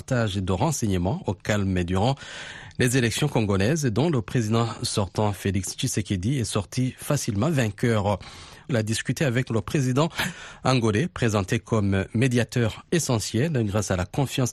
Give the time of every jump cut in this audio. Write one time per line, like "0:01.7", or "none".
0:08.7